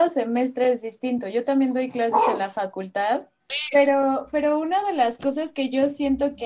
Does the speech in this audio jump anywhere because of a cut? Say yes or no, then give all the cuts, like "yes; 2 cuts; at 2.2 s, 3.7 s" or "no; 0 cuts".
no; 0 cuts